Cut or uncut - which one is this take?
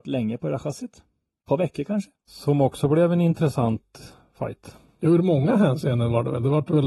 cut